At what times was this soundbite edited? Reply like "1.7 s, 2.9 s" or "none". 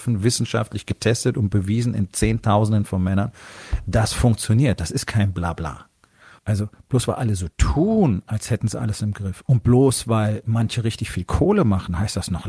6.4 s